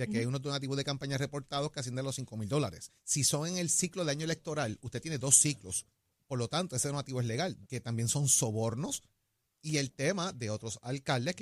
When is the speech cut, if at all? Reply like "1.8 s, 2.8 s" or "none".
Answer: 3.0 s, 7.7 s